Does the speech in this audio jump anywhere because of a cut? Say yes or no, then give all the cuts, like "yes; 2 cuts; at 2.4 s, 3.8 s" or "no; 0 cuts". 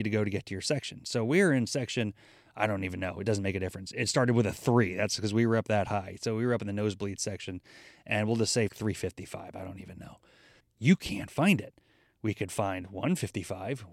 yes; 2 cuts; at 8.7 s, 10.6 s